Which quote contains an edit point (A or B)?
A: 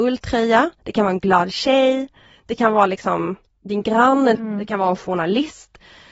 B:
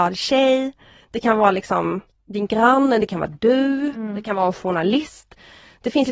A